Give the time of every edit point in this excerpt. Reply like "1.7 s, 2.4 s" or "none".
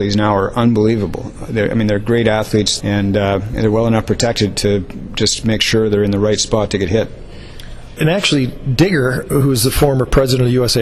2.8 s, 8.0 s

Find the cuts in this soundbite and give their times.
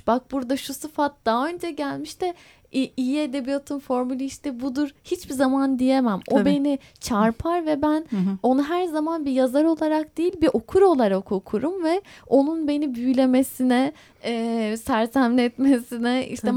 none

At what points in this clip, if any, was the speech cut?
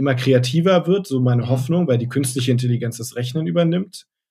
none

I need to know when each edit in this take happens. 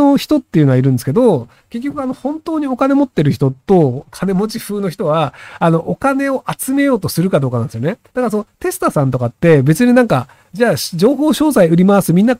8.1 s

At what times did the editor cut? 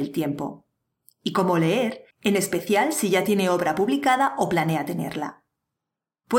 2.1 s

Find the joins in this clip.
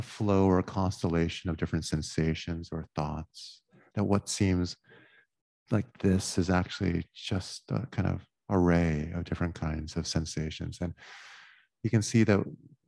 none

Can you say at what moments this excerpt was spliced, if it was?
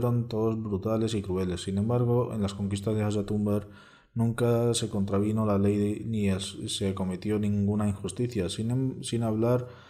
none

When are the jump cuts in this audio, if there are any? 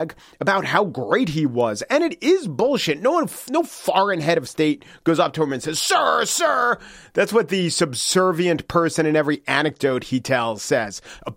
none

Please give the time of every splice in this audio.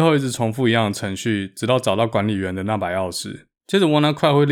3.6 s

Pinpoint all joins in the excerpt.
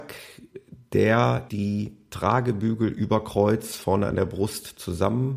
1.5 s

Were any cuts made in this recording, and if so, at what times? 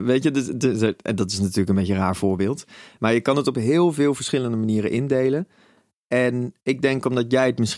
none

